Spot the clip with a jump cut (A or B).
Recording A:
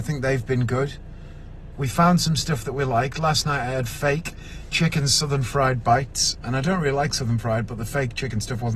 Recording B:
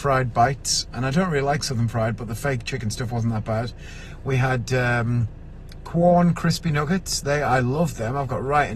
A